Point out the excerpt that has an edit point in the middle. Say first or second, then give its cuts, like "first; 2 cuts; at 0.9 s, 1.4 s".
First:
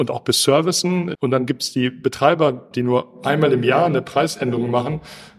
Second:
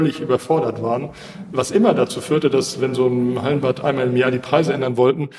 first; 2 cuts; at 1.2 s, 2.7 s